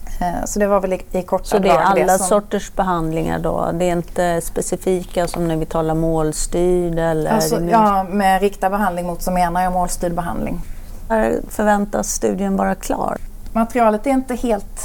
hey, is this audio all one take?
yes; 0 cuts

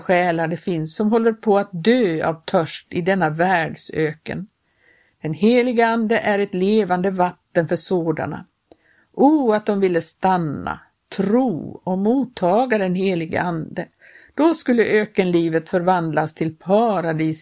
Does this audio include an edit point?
no; 0 cuts

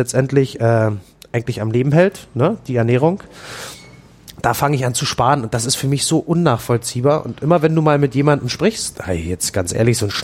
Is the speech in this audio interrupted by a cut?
yes; 1 cut; at 8.9 s

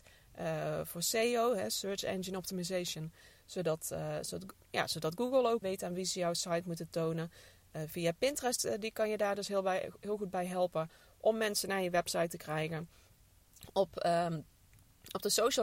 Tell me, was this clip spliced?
yes; 1 cut; at 5.6 s

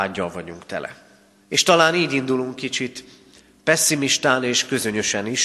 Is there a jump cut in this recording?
yes; 1 cut; at 1.4 s

